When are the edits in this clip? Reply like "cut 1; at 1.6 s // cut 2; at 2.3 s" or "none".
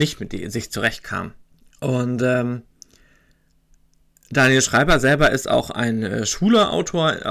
cut 1; at 1.7 s